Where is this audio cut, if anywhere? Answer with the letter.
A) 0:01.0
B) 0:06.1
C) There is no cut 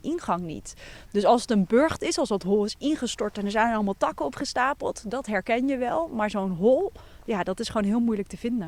C